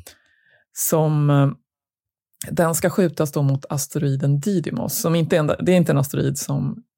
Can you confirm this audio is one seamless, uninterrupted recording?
yes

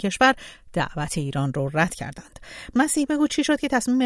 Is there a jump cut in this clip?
yes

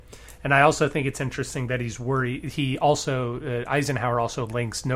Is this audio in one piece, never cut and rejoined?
yes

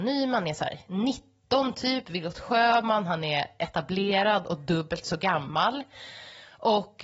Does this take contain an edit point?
no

